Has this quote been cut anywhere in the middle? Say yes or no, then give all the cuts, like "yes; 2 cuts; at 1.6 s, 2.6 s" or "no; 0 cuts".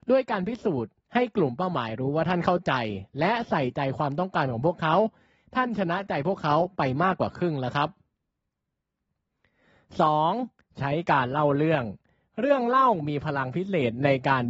yes; 1 cut; at 10.7 s